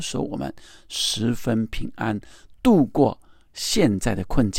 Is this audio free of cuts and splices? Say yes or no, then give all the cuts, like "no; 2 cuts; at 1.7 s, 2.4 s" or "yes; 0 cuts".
yes; 0 cuts